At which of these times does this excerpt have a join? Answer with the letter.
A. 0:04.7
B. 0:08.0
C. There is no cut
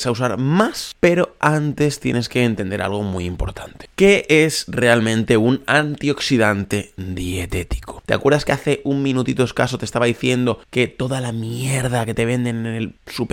B